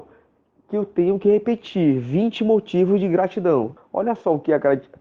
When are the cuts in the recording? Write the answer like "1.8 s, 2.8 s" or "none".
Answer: 3.8 s